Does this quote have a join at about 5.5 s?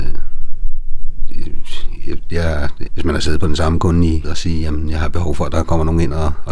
no; 2 cuts; at 2.9 s, 4.2 s

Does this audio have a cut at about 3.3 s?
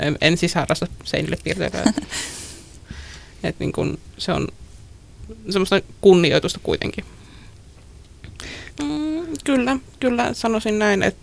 no; 1 cut; at 8.7 s

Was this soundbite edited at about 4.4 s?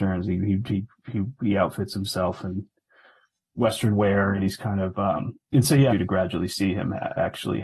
yes; 2 cuts; at 4.4 s, 5.9 s

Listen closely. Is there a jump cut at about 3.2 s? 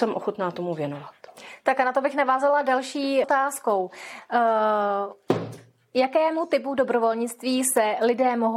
yes; 1 cut; at 3.2 s

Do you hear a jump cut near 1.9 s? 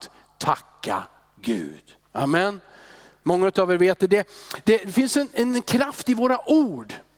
no; 0 cuts

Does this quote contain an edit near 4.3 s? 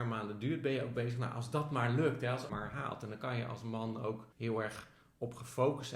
yes; 2 cuts; at 2.5 s, 4.3 s

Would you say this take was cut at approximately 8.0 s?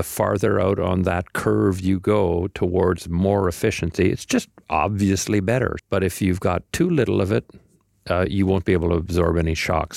no; 1 cut; at 5.8 s

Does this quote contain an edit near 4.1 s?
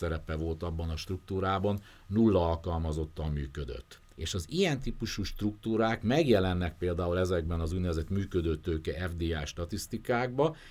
yes; 1 cut; at 4.1 s

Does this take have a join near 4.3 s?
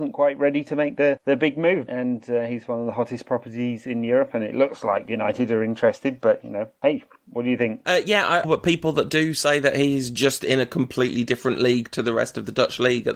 no; 2 cuts; at 1.9 s, 8.4 s

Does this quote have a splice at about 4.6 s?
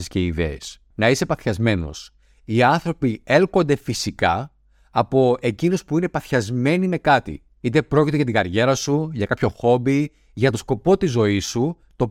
no; 1 cut; at 0.9 s

